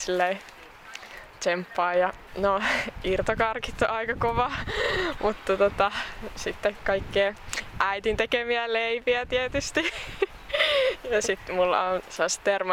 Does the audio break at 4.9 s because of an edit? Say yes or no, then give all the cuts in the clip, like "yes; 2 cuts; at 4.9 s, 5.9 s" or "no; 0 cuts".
no; 1 cut; at 2.3 s